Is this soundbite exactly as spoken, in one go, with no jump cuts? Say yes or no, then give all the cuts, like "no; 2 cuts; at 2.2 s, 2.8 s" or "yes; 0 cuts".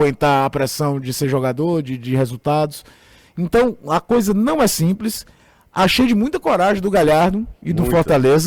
yes; 0 cuts